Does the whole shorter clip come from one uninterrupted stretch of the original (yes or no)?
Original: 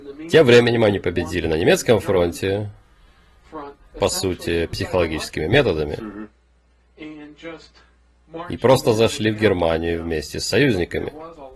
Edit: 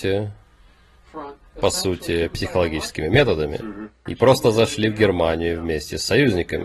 no